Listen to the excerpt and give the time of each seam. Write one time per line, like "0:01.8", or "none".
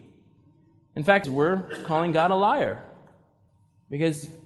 0:01.2